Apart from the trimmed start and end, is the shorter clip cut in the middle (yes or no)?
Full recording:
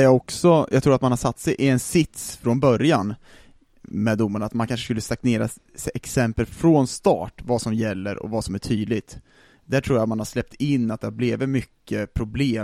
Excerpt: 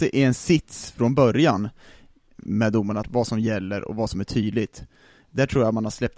yes